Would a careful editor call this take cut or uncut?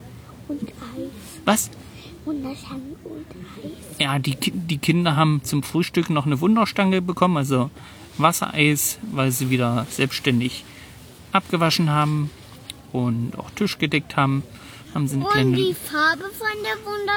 uncut